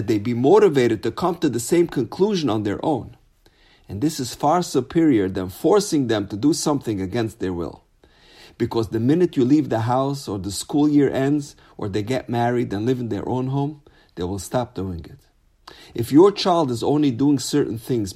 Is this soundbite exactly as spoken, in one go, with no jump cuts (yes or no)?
yes